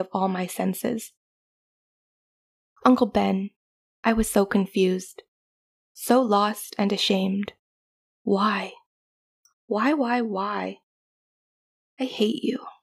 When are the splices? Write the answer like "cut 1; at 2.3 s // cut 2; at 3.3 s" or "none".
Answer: none